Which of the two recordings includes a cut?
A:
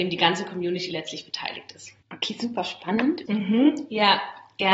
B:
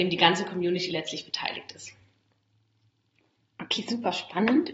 A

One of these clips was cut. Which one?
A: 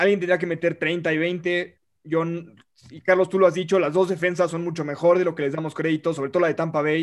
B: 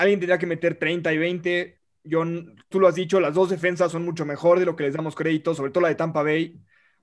B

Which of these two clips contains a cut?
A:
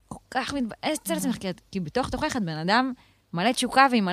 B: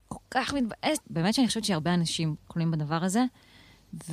B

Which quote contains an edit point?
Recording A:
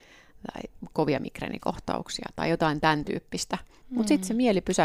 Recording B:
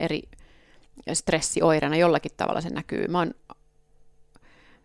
A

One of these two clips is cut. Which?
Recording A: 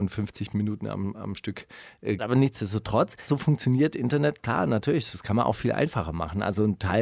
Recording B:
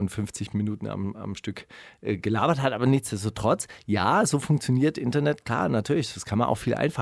A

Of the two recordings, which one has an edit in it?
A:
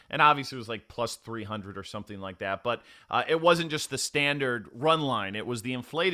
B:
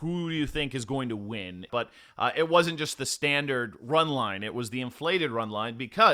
B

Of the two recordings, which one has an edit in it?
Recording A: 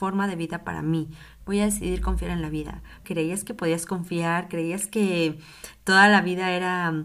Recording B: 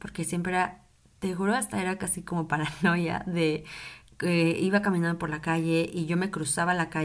A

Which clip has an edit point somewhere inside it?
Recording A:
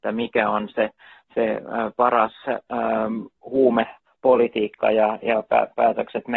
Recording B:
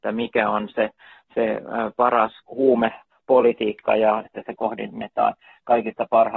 B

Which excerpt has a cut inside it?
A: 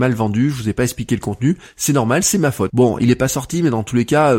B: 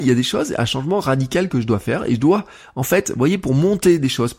A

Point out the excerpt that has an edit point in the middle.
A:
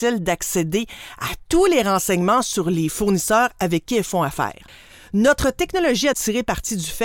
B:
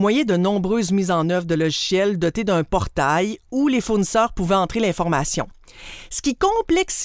A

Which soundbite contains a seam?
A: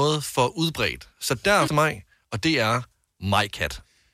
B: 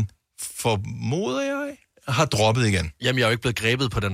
A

